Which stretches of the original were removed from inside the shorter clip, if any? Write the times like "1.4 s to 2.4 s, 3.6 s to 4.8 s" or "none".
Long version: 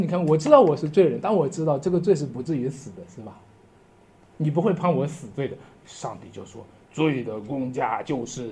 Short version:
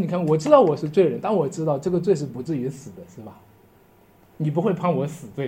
none